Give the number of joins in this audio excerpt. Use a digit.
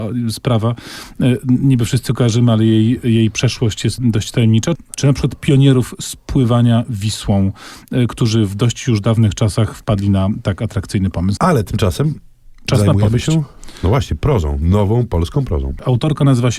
2